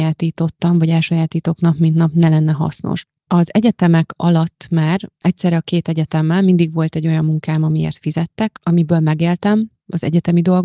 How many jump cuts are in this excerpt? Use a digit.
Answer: 1